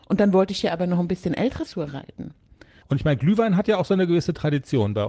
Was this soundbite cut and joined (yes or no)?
yes